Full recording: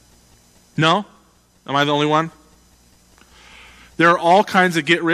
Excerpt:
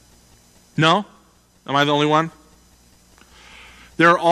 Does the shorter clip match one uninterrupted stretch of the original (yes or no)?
yes